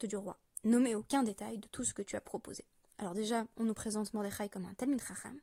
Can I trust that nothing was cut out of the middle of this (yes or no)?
no